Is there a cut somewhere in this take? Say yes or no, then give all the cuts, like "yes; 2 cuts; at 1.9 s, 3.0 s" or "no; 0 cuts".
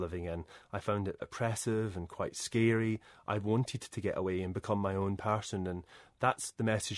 yes; 1 cut; at 1.2 s